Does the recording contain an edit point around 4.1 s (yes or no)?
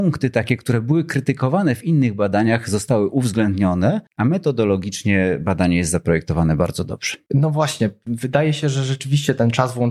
yes